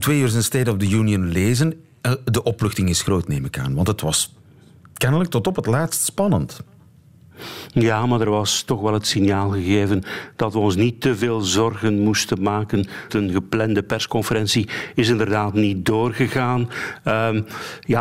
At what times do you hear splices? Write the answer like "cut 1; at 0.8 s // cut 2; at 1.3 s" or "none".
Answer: cut 1; at 13.1 s